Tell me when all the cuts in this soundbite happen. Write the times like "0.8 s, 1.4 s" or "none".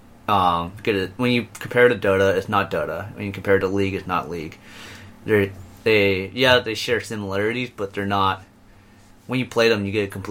none